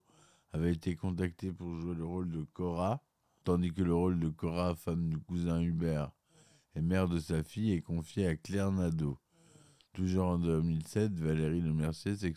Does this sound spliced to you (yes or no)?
yes